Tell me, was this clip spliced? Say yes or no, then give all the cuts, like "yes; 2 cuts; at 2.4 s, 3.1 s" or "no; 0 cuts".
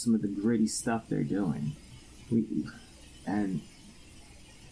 yes; 1 cut; at 3.2 s